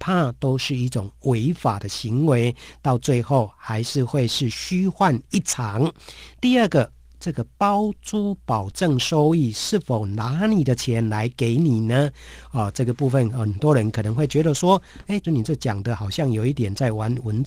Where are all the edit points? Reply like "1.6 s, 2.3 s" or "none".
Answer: 15.2 s, 16.5 s